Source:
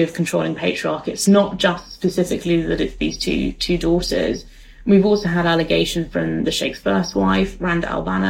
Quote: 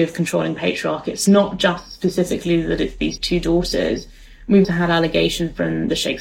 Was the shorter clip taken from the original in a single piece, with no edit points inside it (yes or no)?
no